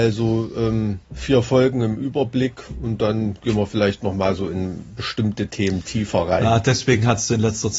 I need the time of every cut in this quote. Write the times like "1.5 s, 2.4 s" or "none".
1.0 s

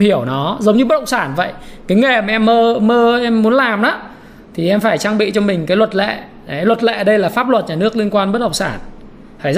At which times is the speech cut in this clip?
none

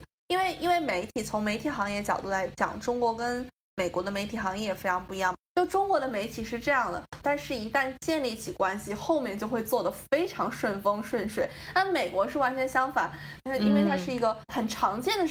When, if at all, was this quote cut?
7.2 s, 13.4 s

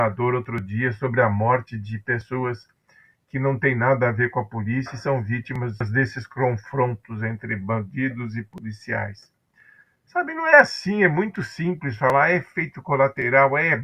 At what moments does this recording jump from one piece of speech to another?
none

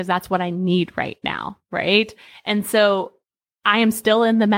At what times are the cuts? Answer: none

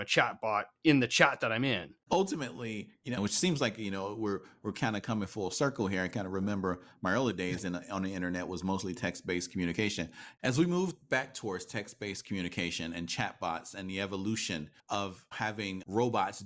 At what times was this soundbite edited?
3.2 s, 14.8 s

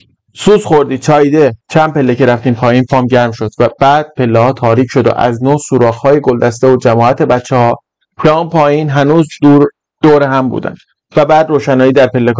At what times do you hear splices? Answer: 1.6 s

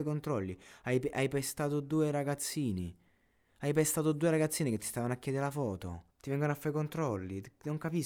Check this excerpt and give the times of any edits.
6.1 s

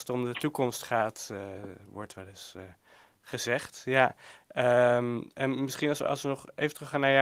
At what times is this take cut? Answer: none

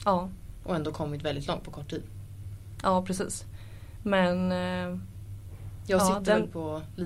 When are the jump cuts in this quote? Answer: none

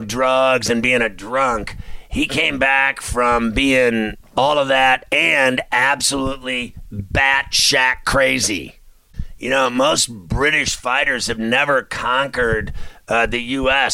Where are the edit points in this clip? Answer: none

